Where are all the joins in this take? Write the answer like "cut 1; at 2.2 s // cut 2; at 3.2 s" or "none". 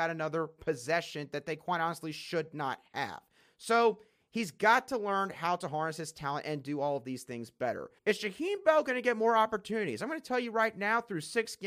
cut 1; at 8.0 s

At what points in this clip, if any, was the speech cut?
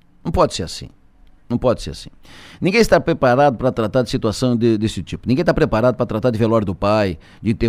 none

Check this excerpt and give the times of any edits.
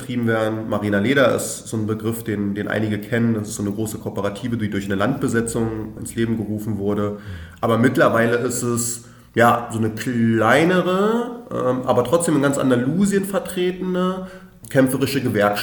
none

